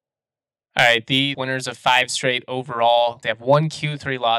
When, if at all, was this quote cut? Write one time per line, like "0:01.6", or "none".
0:01.3
0:03.2